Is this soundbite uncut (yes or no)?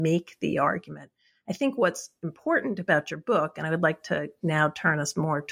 yes